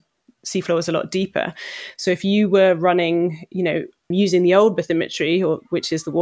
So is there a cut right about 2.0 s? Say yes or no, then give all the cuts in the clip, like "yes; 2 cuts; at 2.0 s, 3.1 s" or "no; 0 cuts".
yes; 2 cuts; at 2.0 s, 4.1 s